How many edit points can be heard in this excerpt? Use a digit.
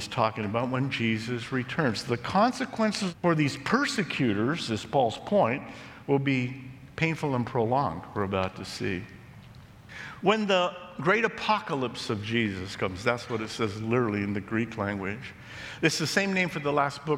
0